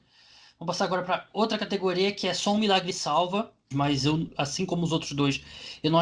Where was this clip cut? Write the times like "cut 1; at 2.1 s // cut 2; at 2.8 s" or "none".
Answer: cut 1; at 3.7 s